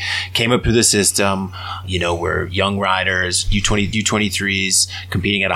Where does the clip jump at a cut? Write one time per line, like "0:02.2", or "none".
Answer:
0:01.8
0:03.9